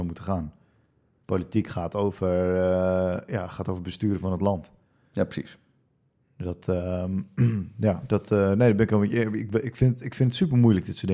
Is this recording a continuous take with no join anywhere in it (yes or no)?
yes